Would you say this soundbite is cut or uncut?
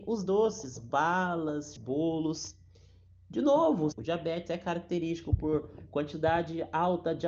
cut